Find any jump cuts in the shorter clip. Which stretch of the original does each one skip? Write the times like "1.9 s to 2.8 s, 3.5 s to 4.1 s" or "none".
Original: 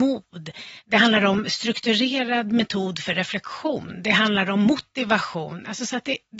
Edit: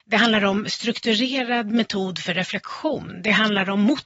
none